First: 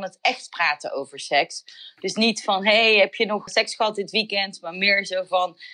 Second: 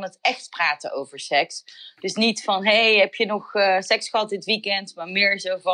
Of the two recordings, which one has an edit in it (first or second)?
first